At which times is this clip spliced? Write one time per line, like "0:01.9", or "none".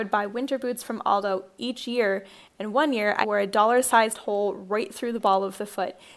0:03.2